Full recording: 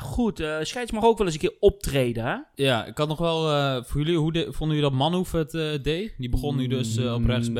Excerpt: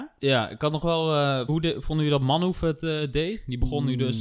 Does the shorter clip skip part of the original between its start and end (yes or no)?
yes